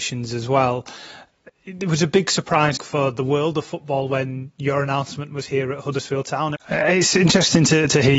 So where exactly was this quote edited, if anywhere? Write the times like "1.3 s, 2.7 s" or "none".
2.8 s, 6.6 s

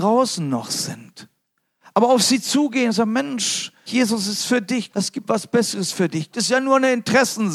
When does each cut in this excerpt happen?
3.9 s, 4.9 s, 6.3 s

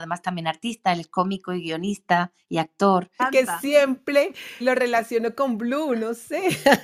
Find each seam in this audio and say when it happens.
3.2 s, 4.6 s

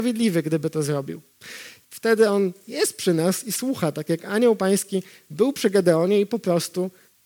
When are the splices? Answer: 1.8 s

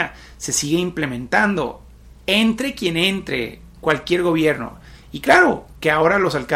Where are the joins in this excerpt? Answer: none

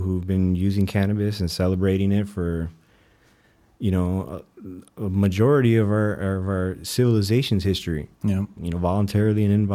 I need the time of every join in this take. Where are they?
8.6 s

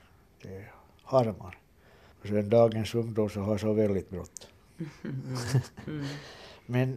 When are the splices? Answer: 2.1 s

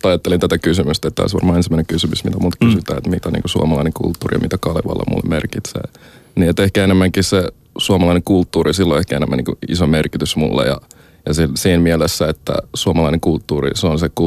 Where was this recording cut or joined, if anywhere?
none

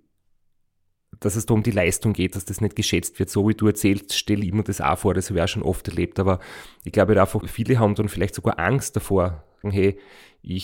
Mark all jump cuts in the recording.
7.4 s, 9.6 s

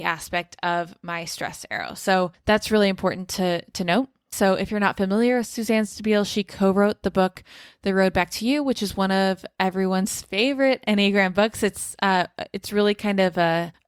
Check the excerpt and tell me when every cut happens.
4.3 s

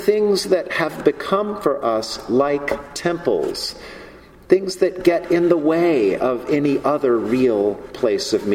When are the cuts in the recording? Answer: none

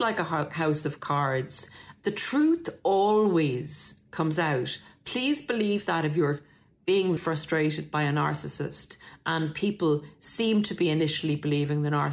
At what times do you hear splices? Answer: 2.0 s, 7.2 s

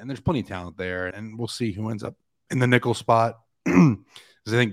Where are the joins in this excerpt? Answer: 1.1 s

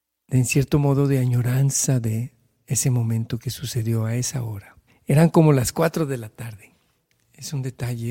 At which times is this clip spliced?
4.9 s

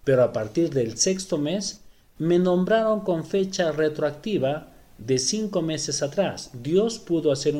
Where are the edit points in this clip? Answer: none

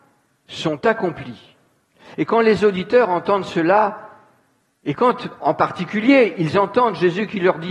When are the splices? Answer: 2.1 s

